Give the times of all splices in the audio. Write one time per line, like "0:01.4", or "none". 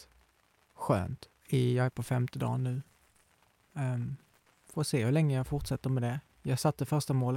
0:01.4